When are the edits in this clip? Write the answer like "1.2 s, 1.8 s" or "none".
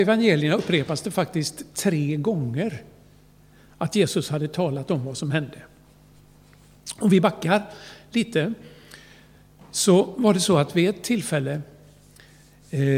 none

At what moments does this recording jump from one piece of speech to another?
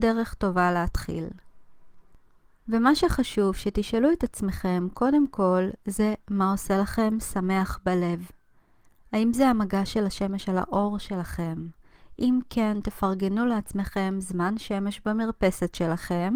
none

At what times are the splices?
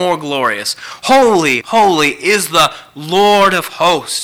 1.6 s

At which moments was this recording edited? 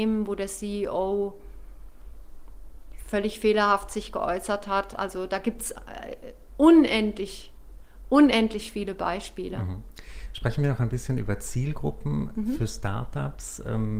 none

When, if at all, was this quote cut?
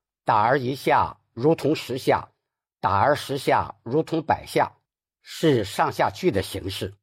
none

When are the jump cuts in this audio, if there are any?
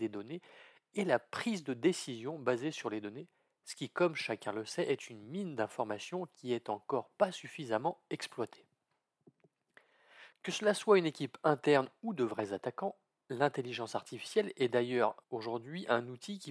10.3 s, 15.2 s

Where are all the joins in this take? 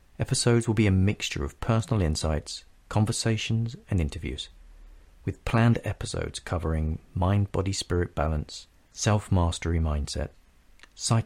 8.9 s

